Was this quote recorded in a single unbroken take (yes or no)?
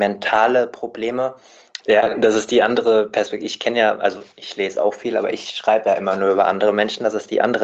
no